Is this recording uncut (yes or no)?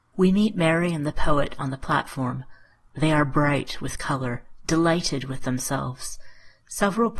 yes